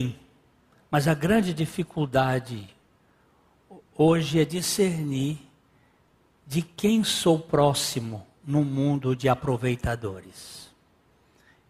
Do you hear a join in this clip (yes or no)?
no